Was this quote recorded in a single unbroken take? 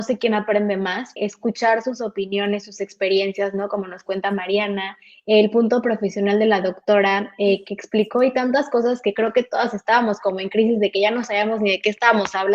no; 1 cut; at 1.2 s

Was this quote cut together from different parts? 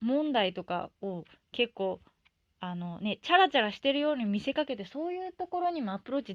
no; 0 cuts

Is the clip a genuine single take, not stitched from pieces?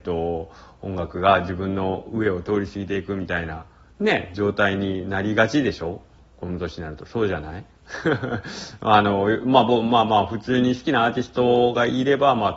yes; 0 cuts

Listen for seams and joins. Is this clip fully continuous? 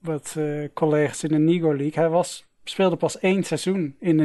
yes; 0 cuts

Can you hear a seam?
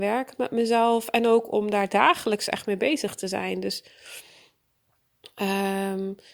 no; 0 cuts

